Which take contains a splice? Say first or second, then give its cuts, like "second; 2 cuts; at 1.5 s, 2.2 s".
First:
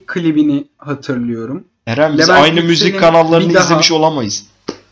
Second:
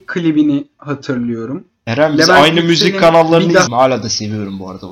second; 1 cut; at 3.7 s